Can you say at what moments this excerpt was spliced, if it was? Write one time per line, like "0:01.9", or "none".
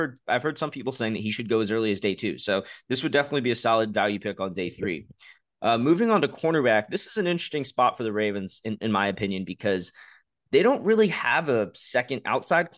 none